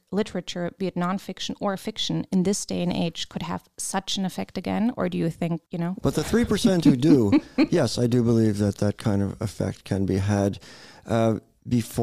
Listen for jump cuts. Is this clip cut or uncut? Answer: cut